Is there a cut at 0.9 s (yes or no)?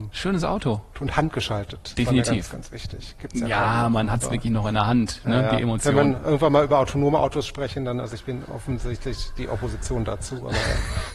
yes